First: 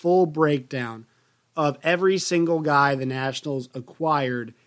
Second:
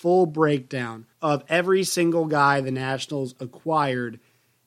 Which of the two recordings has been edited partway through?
second; 1 cut; at 1.1 s

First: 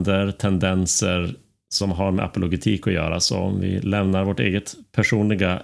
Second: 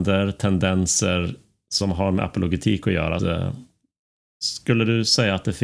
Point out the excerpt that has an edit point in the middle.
second; 1 cut; at 3.2 s

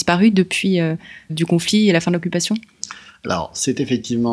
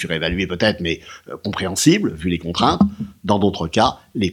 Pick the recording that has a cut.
first; 1 cut; at 1.3 s

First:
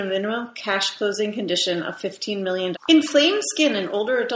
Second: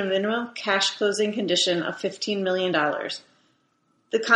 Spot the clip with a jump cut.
first; 1 cut; at 2.7 s

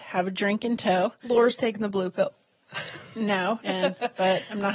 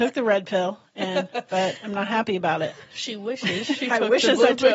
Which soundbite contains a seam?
first; 1 cut; at 3.6 s

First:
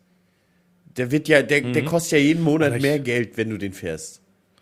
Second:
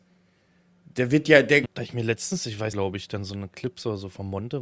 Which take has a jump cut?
second; 2 cuts; at 1.6 s, 2.7 s

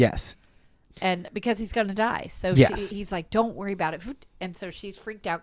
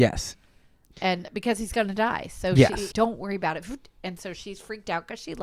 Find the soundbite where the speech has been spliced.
second; 1 cut; at 2.9 s

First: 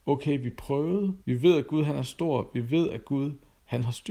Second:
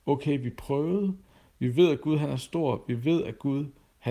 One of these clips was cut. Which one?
first; 1 cut; at 1.2 s

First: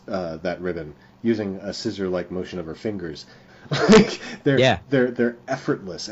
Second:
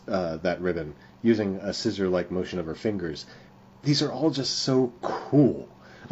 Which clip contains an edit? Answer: first; 1 cut; at 3.5 s

